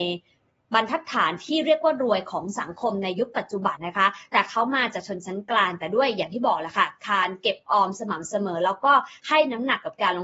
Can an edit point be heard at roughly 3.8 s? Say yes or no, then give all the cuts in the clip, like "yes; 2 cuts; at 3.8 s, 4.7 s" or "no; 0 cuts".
yes; 1 cut; at 3.8 s